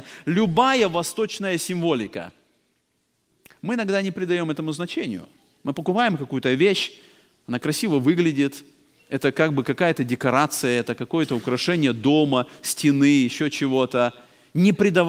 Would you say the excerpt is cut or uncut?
uncut